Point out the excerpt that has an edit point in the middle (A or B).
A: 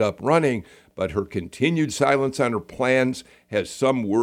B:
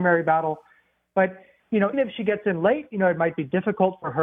B